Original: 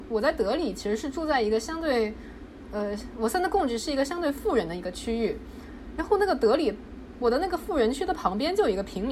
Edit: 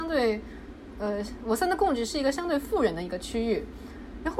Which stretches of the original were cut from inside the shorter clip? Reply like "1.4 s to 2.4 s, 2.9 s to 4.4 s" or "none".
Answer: none